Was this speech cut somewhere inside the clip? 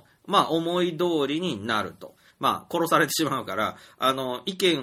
yes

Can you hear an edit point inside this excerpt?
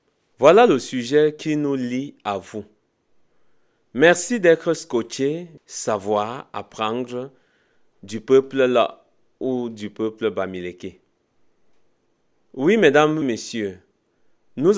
yes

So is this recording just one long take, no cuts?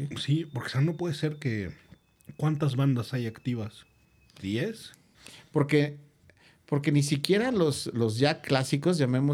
yes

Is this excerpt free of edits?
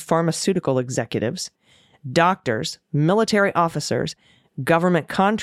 yes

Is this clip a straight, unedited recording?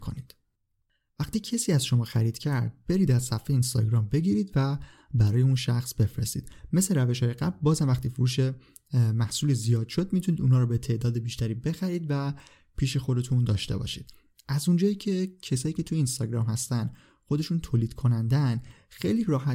yes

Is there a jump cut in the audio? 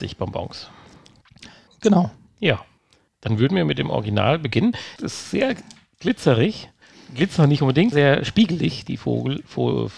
yes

